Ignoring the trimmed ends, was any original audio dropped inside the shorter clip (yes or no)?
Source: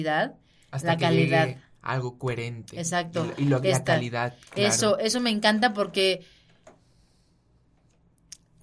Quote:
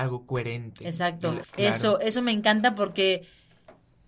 yes